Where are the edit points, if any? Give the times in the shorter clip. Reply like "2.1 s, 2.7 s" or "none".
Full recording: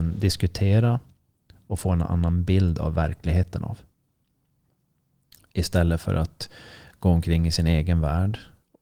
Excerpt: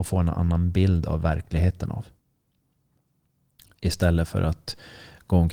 none